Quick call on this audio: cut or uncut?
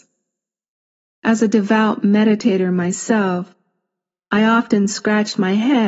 cut